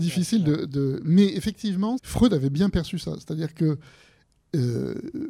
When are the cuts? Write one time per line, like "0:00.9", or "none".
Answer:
0:02.0

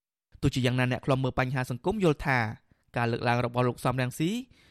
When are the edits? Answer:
none

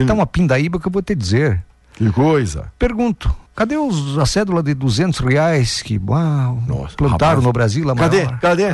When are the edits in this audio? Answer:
0:03.5

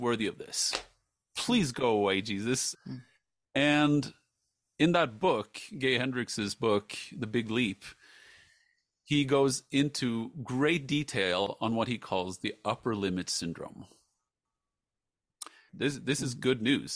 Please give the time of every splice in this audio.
0:02.7
0:15.7

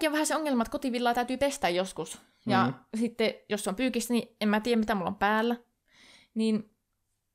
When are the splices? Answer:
none

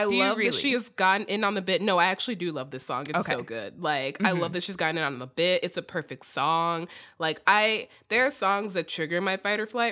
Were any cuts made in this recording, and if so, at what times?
none

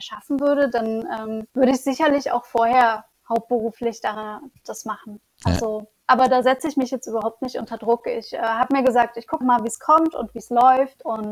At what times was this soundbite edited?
0:01.5
0:09.4

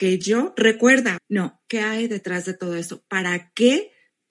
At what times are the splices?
0:01.2

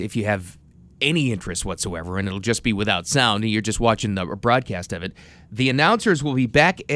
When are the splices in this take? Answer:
none

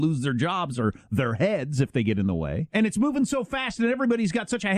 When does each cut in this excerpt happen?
0:02.7

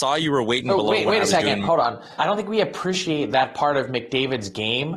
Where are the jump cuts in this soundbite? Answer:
0:02.2

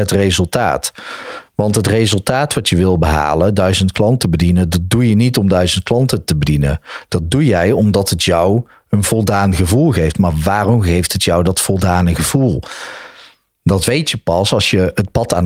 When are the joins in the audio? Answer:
none

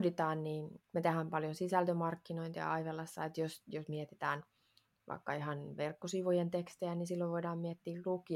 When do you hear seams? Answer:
none

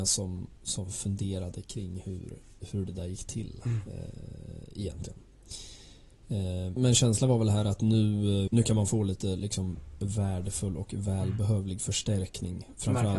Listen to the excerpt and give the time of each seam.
0:06.8
0:08.5

